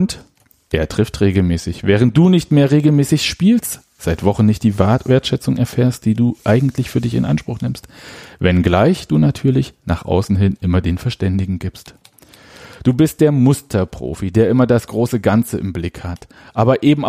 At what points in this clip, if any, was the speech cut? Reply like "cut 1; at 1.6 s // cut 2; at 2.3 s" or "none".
none